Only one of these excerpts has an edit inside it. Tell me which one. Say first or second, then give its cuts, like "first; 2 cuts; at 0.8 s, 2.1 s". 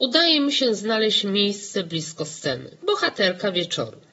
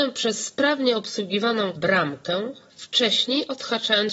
first; 1 cut; at 2.8 s